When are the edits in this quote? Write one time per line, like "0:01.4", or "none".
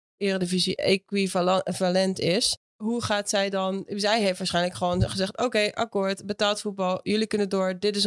none

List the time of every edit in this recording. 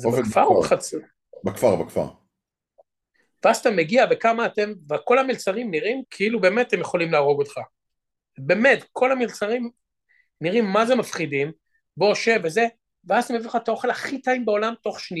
0:06.0

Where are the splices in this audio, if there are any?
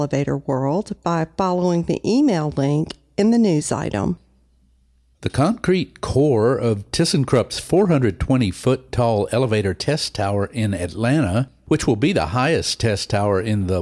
none

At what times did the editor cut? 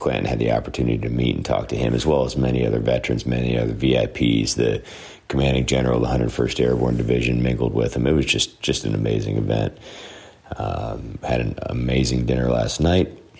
none

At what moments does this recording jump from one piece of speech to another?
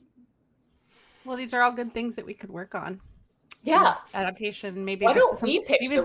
none

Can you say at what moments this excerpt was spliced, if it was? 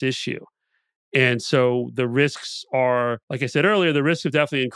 0:03.2

